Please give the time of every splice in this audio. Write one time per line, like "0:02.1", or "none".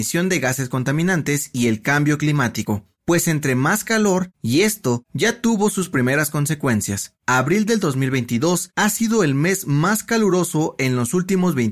0:04.3
0:07.2